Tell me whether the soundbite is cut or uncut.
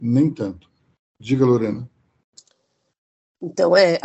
cut